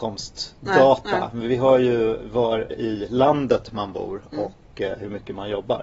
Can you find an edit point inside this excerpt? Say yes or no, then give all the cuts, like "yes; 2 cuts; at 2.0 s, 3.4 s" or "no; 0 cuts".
yes; 1 cut; at 2.7 s